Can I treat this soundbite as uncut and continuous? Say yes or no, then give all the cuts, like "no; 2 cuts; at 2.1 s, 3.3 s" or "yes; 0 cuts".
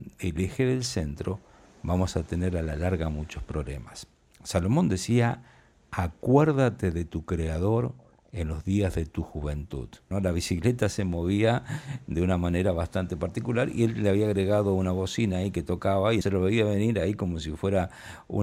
no; 2 cuts; at 10.1 s, 16.2 s